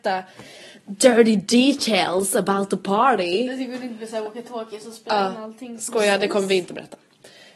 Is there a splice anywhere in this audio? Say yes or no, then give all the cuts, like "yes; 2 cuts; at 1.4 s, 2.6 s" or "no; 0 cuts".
no; 0 cuts